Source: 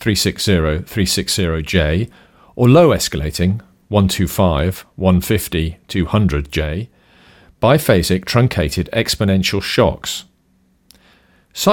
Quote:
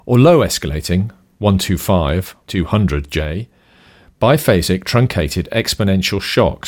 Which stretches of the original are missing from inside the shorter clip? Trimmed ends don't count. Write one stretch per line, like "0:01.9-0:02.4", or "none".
0:04.9-0:05.8

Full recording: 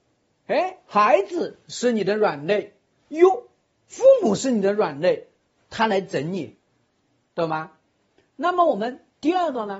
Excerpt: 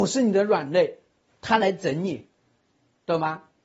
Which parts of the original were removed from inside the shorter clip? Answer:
none

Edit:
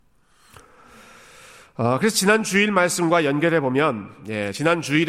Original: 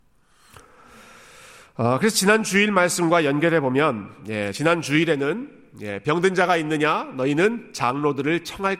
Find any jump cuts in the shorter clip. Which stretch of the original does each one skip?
none

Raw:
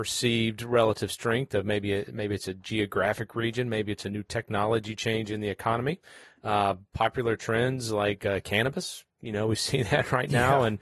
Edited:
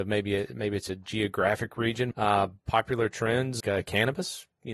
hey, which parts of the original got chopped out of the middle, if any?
0:03.7-0:06.4
0:07.9-0:08.2

